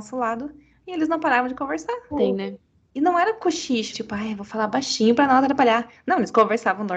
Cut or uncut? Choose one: cut